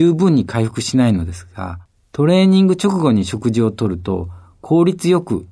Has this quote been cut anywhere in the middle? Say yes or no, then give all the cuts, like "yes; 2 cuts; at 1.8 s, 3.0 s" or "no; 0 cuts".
no; 0 cuts